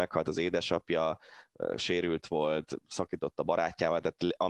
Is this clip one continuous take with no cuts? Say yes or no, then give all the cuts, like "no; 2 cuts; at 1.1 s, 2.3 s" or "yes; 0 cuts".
yes; 0 cuts